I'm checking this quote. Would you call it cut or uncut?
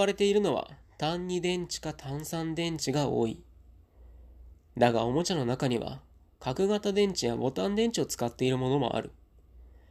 uncut